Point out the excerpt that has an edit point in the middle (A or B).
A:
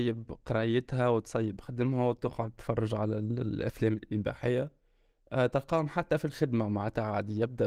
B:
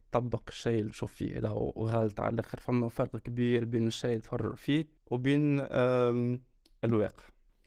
B